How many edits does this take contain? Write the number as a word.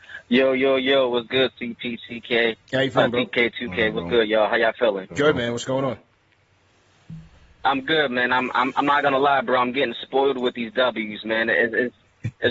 zero